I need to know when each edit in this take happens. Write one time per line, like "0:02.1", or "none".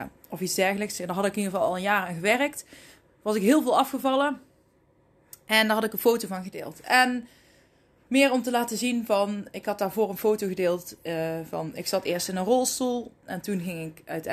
none